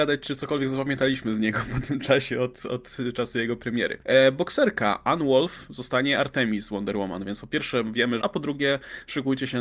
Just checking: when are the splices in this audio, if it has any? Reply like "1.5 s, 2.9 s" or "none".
4.0 s, 8.2 s

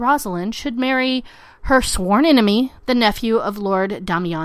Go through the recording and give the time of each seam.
2.8 s

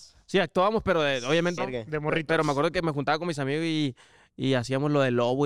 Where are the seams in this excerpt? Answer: 1.6 s

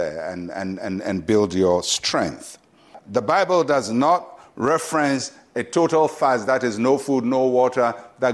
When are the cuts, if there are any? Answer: 3.0 s

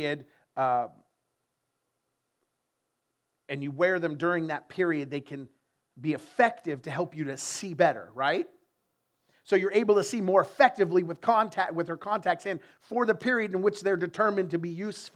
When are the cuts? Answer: none

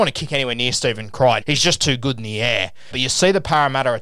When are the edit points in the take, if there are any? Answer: 1.4 s, 2.9 s

